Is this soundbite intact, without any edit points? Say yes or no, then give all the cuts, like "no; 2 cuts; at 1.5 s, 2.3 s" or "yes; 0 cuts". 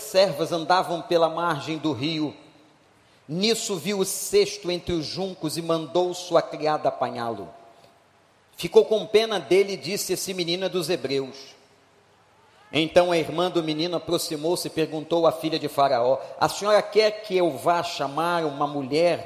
no; 1 cut; at 8.4 s